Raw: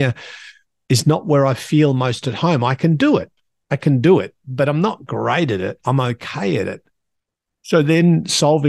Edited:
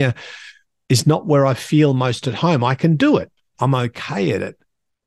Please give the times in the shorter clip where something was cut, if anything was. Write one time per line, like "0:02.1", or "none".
0:03.5